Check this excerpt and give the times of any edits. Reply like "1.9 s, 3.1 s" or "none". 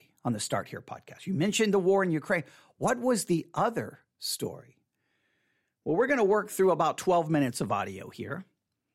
none